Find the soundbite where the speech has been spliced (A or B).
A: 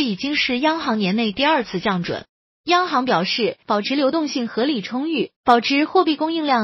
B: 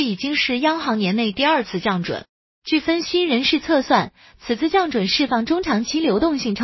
A